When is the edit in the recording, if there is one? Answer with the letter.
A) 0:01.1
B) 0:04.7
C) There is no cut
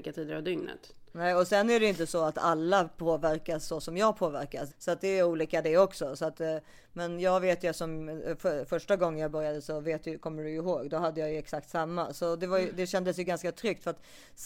B